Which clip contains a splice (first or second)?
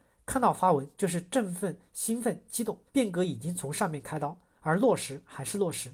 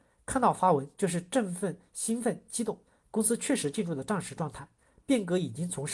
first